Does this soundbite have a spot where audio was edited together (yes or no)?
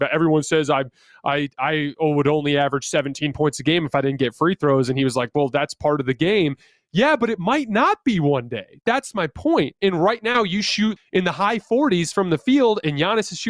yes